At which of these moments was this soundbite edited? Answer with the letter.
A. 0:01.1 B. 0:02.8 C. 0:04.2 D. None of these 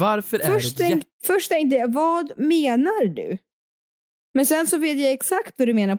A